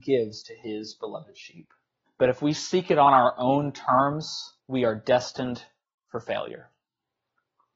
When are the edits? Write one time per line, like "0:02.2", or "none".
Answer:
0:02.1
0:04.6